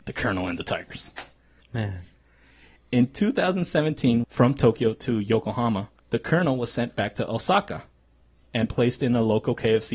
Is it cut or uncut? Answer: cut